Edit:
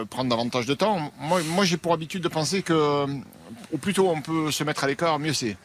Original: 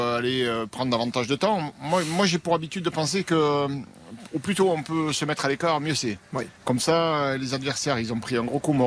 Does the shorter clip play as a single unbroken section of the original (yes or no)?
yes